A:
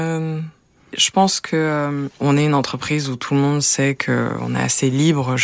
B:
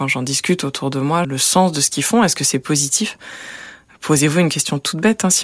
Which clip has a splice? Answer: B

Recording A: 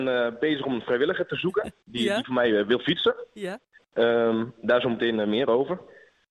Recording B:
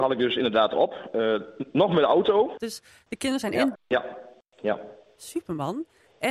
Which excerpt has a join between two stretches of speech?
B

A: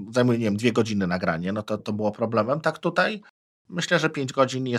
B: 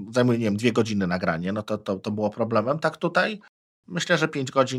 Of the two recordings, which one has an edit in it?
A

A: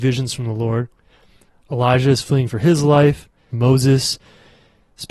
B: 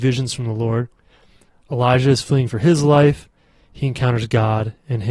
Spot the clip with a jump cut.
A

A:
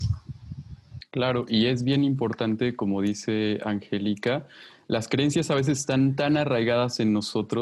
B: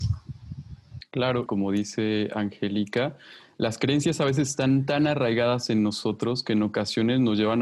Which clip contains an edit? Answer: B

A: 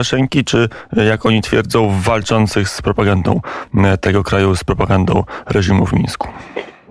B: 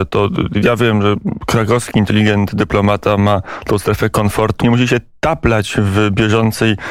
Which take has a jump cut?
B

